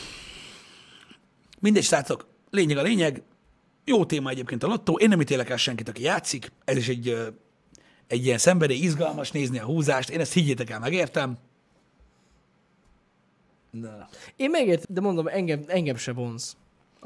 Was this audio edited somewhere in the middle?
yes; 2 cuts; at 6.6 s, 14.8 s

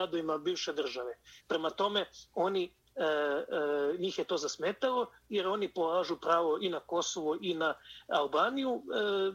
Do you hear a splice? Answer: yes; 1 cut; at 1.4 s

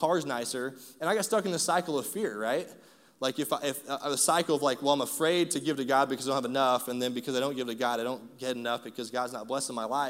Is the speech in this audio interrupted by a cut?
no; 0 cuts

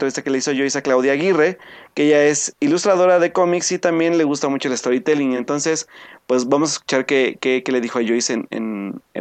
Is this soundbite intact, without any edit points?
yes; 0 cuts

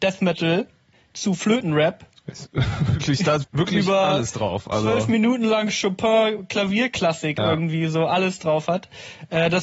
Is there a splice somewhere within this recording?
yes; 1 cut; at 3.4 s

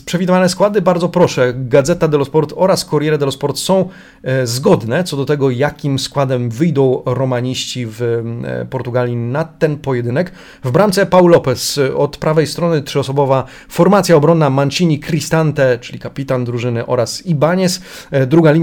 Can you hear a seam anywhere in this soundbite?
no; 0 cuts

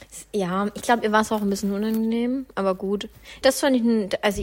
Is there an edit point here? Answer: yes; 1 cut; at 3.4 s

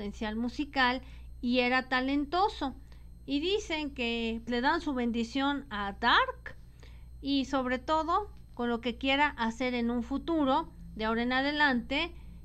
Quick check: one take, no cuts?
no; 1 cut; at 4.5 s

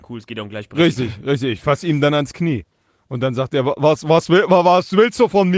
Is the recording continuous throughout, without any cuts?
yes; 0 cuts

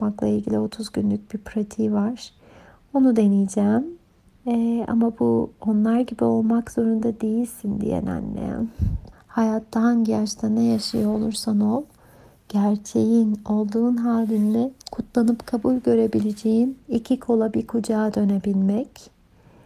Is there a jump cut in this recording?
yes; 3 cuts; at 4.4 s, 9.1 s, 14.8 s

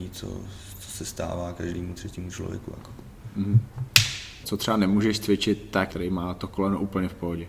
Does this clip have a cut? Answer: yes; 2 cuts; at 4.4 s, 5.9 s

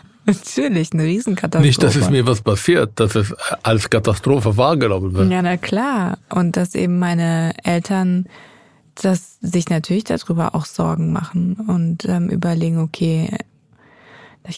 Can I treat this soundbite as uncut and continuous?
yes; 0 cuts

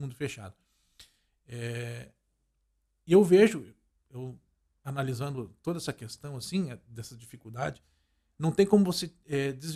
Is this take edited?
no; 0 cuts

